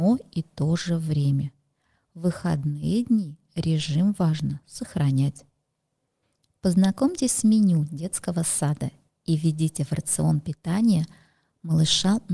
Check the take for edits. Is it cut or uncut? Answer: uncut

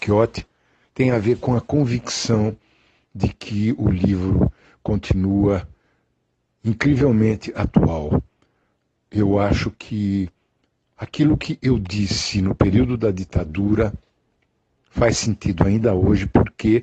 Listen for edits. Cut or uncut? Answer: uncut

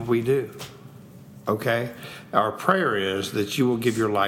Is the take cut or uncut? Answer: uncut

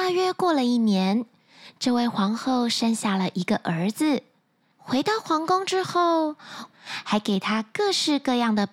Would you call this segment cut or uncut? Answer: cut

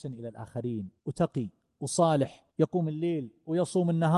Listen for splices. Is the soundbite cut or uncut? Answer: cut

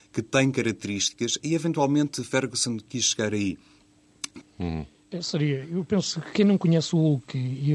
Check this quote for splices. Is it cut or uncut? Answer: cut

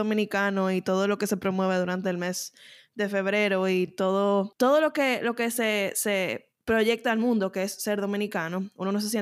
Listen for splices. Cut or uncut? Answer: uncut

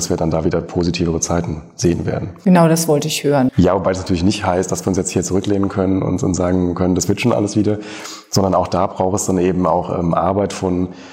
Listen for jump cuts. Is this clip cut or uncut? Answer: cut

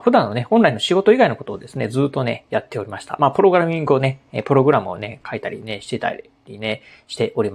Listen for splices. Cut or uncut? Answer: uncut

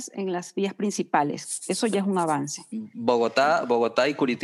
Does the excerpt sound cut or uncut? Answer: uncut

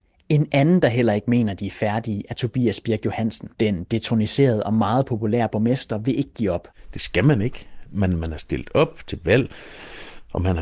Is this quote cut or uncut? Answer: cut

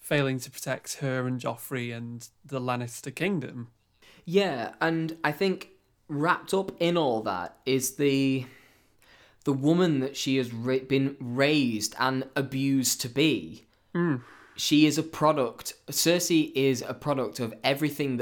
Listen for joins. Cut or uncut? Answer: uncut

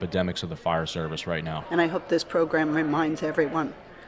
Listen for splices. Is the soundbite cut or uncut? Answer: cut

